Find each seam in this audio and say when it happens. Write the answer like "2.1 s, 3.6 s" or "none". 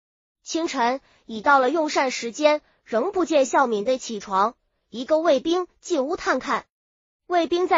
none